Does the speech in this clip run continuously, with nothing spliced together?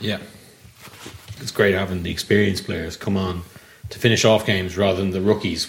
no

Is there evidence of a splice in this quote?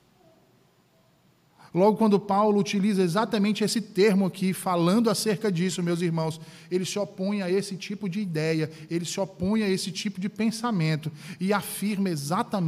no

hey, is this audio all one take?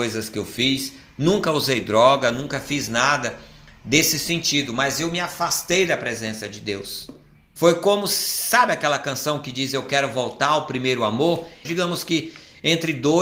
no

